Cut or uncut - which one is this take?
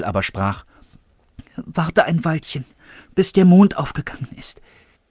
uncut